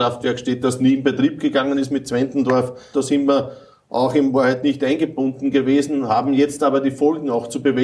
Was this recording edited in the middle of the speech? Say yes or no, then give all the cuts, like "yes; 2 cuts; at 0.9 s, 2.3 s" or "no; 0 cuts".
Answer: yes; 1 cut; at 2.9 s